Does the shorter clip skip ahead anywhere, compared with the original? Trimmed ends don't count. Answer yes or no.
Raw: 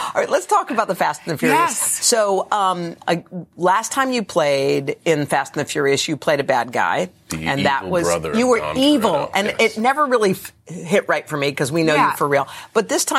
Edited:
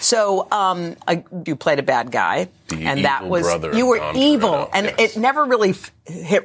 yes